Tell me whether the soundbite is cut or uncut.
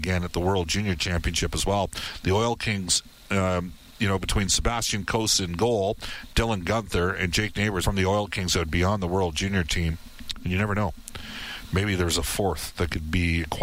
cut